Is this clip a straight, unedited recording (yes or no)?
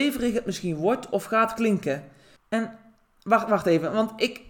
no